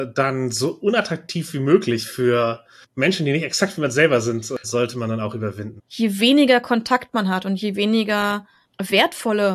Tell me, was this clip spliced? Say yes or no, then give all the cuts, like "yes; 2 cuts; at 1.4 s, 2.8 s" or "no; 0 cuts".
yes; 2 cuts; at 4.6 s, 5.8 s